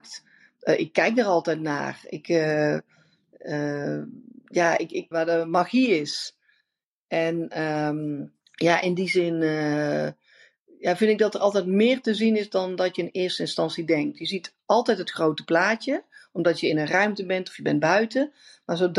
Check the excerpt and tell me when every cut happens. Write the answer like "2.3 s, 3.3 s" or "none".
5.1 s, 8.4 s